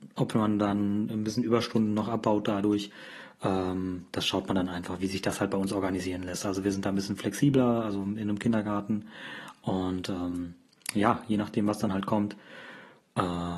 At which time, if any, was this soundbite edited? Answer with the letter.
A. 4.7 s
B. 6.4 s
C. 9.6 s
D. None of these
D